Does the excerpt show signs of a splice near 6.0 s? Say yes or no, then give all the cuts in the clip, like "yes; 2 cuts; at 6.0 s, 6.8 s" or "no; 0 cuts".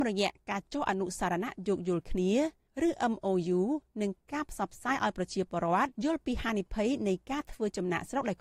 yes; 1 cut; at 6.0 s